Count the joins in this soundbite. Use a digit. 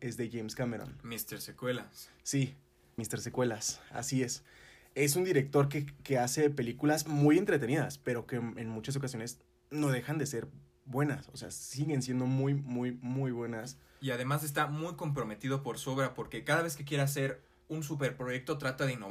1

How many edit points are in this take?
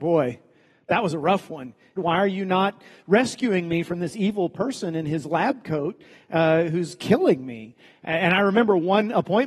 1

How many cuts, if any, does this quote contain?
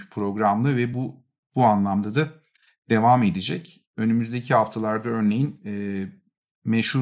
0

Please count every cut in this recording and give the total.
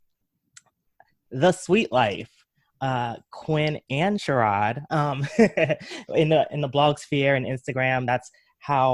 1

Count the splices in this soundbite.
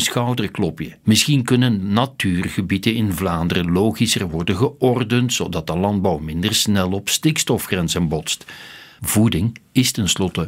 2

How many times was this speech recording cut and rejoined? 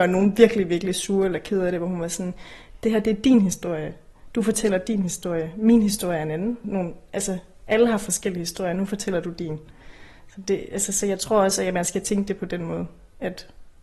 1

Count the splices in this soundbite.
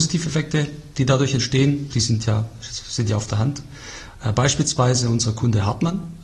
1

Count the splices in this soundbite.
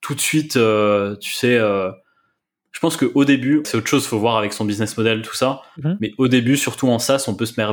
1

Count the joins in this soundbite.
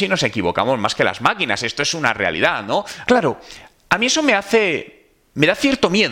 1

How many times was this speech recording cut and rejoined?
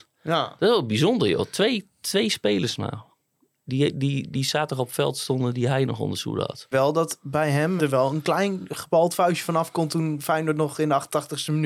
2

